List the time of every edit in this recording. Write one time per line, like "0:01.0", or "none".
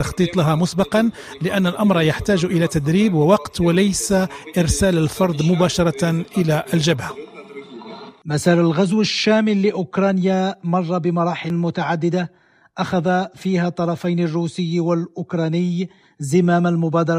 none